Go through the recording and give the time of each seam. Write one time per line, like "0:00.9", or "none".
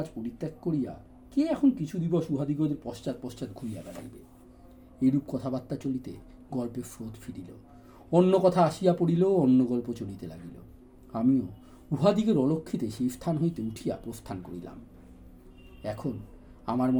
0:05.8